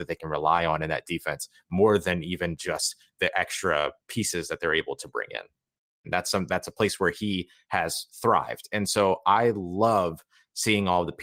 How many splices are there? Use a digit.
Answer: 1